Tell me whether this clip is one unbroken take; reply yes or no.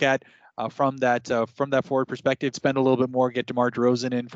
no